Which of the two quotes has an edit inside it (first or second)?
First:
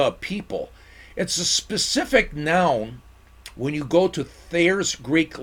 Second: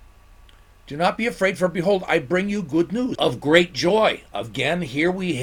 second